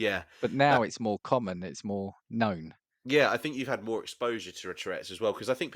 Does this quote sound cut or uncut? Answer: uncut